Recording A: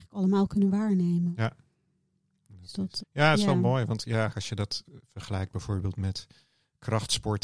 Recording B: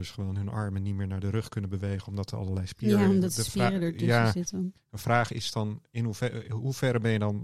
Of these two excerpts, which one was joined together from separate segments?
A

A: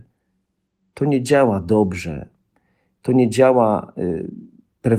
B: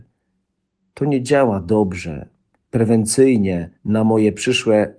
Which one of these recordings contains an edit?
B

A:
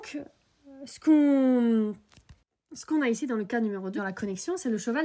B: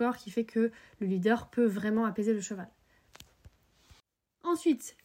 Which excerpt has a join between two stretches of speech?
A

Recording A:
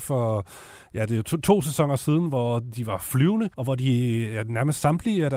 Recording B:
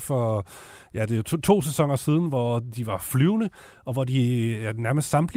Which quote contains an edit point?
A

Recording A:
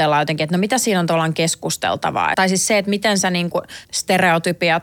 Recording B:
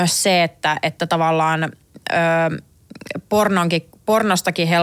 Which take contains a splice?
A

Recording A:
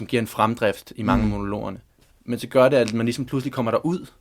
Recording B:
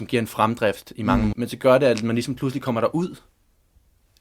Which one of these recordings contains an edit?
B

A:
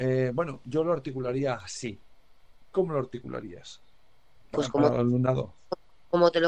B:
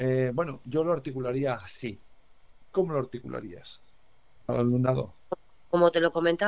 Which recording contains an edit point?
B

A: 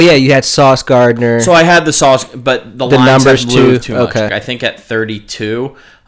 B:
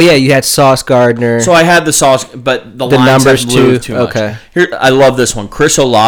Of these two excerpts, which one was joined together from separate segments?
A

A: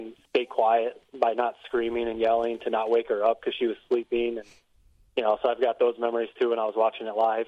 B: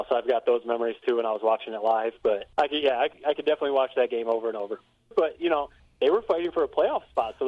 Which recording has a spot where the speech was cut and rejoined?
B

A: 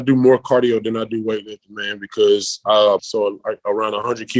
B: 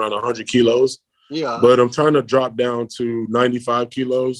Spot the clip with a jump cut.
A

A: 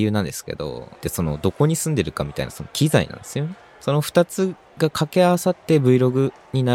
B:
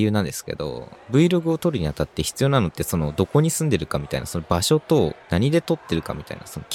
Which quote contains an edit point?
A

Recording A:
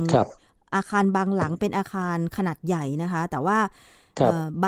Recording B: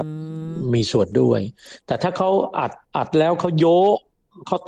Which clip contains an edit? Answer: B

